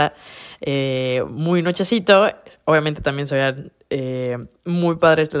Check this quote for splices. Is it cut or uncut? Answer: uncut